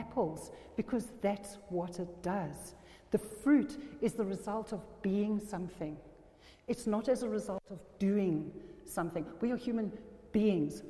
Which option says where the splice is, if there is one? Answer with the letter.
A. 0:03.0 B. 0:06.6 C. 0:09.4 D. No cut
D